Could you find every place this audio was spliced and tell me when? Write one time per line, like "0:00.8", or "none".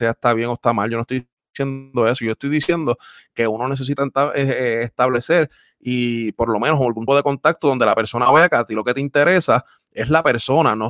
0:07.1